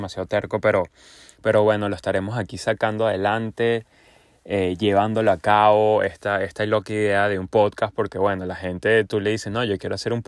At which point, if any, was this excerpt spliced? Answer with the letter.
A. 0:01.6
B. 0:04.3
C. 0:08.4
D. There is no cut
D